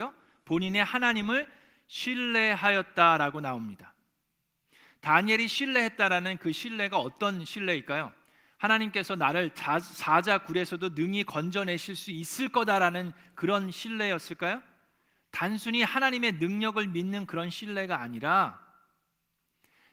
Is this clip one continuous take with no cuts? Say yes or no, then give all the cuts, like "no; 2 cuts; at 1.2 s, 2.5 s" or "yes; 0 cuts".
yes; 0 cuts